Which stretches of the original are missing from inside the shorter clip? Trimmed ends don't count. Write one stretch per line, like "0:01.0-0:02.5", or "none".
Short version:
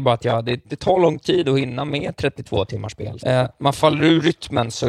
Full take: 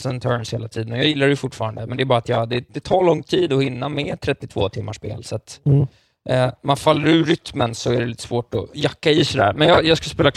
0:05.2-0:06.2